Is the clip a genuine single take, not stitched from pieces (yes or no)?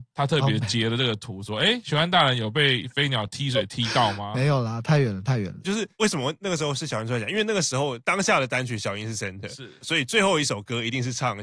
no